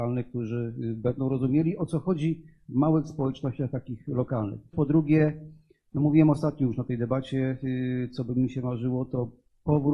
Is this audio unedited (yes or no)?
no